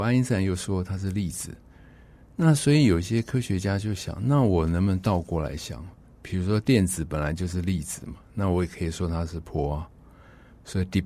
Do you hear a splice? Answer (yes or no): no